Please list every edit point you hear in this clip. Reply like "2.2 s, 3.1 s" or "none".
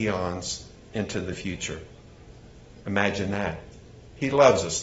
none